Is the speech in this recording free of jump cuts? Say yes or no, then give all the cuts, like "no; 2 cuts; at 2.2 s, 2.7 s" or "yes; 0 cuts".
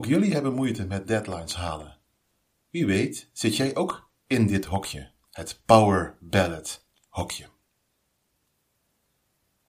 yes; 0 cuts